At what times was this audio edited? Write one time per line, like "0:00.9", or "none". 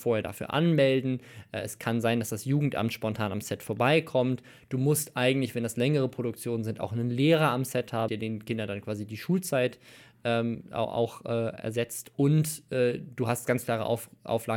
0:08.1